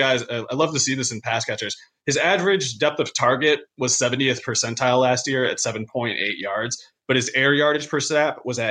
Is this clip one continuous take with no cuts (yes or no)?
yes